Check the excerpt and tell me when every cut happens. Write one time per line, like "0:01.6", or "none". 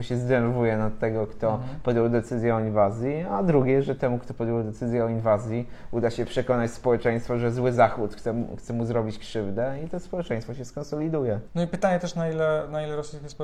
none